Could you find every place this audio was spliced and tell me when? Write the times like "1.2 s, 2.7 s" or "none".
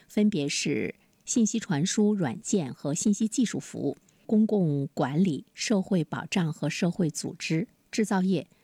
none